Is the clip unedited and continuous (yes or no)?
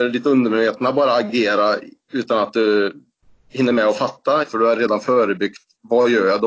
no